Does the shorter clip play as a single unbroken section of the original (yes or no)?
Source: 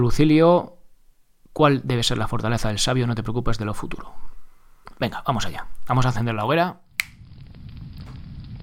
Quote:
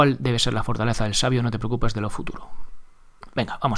yes